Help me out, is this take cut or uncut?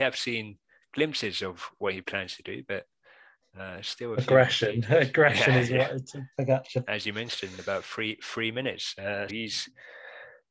cut